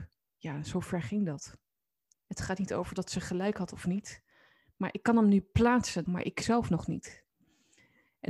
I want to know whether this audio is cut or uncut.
cut